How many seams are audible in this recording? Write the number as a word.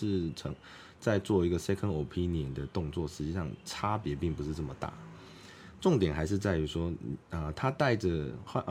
zero